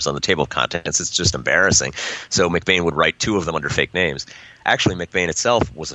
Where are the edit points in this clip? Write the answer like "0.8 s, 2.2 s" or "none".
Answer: none